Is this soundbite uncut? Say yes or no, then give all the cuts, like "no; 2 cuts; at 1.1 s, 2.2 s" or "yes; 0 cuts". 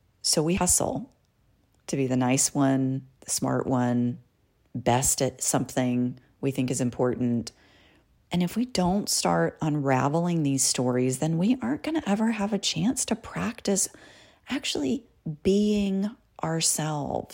yes; 0 cuts